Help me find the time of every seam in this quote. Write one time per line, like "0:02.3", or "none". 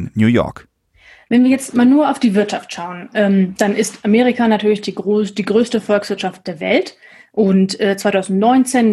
none